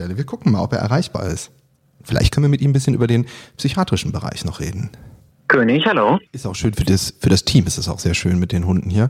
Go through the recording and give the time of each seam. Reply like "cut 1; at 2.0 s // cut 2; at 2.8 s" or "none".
cut 1; at 6.3 s